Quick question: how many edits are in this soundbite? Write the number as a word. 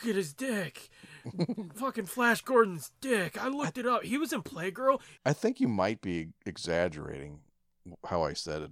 one